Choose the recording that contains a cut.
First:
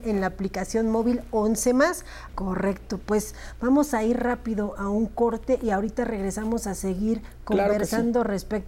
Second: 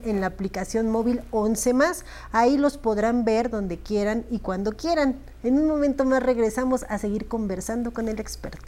first; 1 cut; at 2.3 s

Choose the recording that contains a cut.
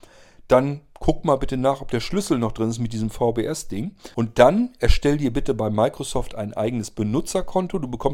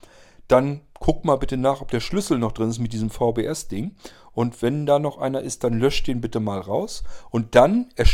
first; 1 cut; at 4.1 s

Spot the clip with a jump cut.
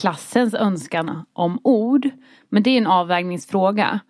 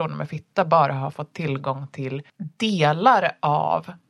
second; 1 cut; at 2.3 s

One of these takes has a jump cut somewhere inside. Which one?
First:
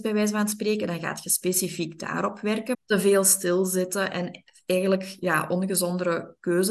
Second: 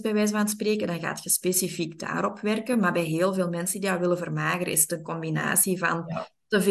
first; 1 cut; at 2.7 s

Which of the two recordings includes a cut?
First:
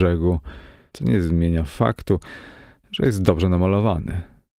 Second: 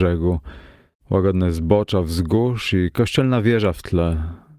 first; 1 cut; at 0.9 s

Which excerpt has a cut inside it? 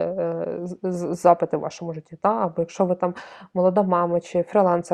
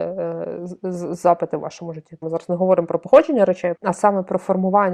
second; 2 cuts; at 2.2 s, 3.7 s

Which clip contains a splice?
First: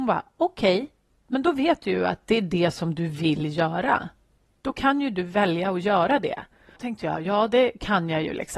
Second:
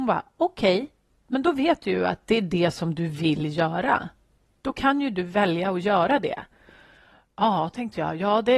first; 1 cut; at 6.8 s

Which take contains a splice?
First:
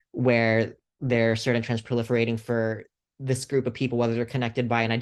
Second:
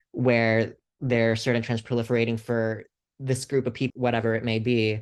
second; 1 cut; at 3.9 s

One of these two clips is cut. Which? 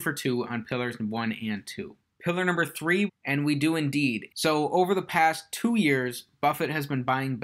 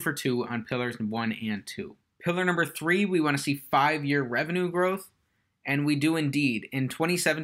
first; 2 cuts; at 3.1 s, 4.3 s

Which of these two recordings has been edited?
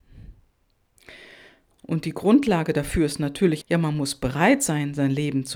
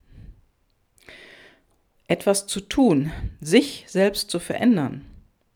first; 2 cuts; at 1.8 s, 3.6 s

